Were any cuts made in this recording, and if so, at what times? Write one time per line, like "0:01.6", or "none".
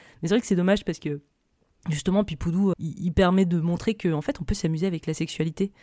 0:02.7